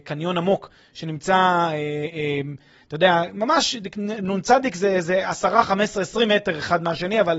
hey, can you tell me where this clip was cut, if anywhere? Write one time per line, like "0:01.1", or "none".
none